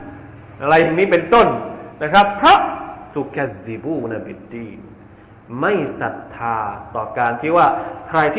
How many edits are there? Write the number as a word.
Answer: zero